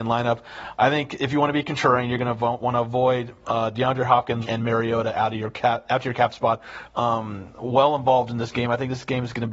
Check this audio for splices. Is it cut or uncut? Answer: cut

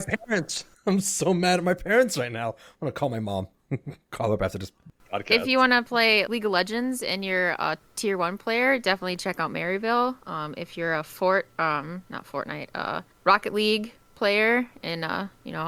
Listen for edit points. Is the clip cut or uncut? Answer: cut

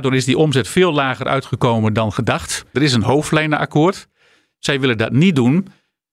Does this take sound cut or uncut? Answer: cut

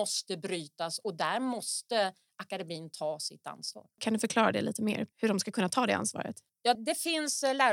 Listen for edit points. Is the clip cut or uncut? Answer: cut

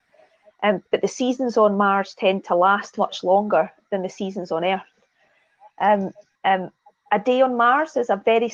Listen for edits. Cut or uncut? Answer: cut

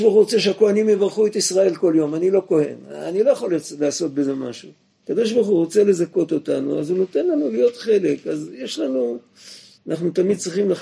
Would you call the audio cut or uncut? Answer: cut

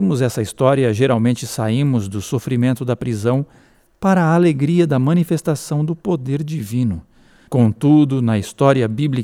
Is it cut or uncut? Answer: cut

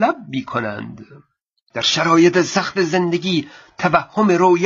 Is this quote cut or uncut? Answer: uncut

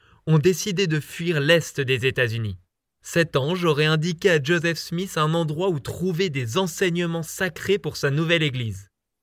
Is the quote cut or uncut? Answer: cut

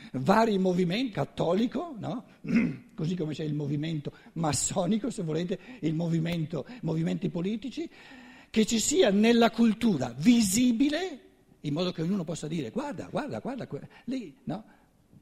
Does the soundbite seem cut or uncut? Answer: cut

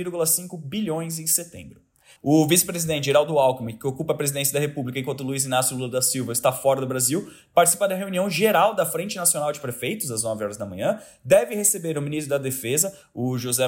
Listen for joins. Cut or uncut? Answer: cut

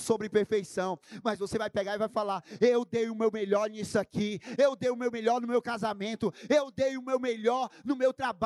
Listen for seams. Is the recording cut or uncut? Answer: cut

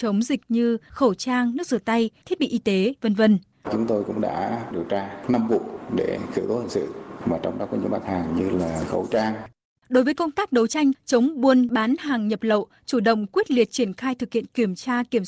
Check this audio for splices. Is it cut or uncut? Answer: cut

